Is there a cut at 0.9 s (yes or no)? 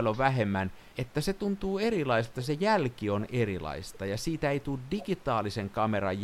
yes